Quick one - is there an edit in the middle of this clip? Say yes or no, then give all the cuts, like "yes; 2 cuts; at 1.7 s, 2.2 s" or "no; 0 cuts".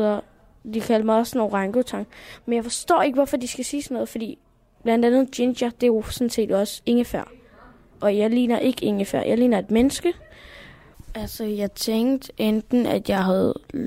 no; 0 cuts